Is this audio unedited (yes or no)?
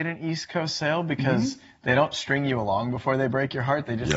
yes